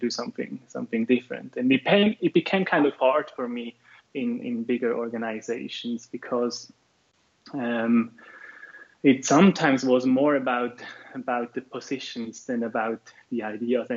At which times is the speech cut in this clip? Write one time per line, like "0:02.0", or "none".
none